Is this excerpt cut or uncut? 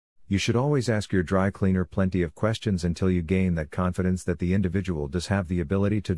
uncut